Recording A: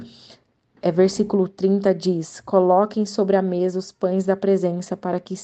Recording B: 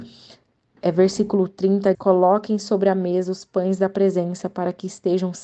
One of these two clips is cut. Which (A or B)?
B